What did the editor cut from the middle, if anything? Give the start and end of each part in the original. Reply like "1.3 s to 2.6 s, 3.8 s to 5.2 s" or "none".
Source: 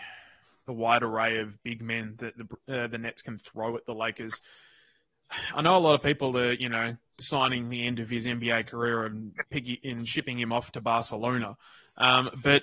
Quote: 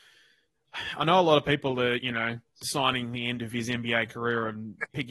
none